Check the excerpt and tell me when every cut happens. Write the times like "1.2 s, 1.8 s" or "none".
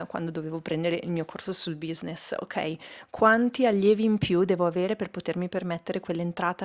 none